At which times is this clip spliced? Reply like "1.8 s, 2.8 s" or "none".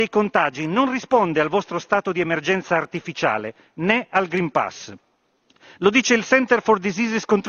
none